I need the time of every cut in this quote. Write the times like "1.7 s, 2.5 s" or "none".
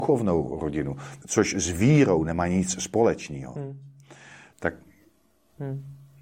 1.2 s, 4.5 s